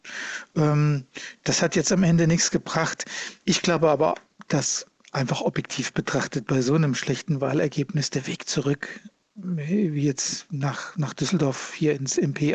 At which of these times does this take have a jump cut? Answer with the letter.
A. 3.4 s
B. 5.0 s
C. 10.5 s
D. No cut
A